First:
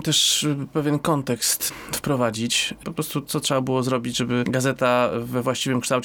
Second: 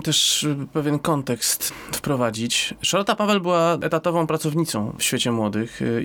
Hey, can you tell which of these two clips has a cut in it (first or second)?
first